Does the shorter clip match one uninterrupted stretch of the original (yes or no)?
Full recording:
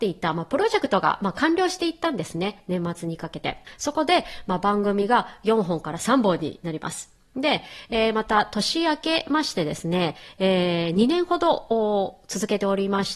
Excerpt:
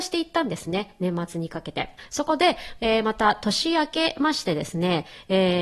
no